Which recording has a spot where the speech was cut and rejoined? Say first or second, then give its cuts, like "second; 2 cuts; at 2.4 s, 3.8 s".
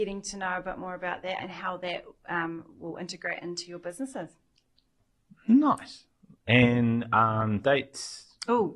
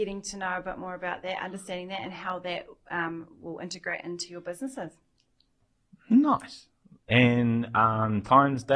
first; 2 cuts; at 1.4 s, 7.6 s